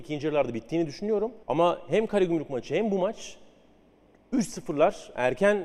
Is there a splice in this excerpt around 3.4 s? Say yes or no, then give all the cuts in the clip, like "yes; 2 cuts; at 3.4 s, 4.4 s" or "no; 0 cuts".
no; 1 cut; at 1.4 s